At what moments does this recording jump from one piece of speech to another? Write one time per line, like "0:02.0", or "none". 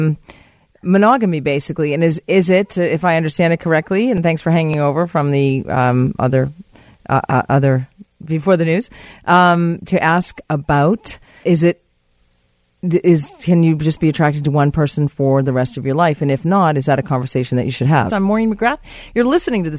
0:11.4
0:18.1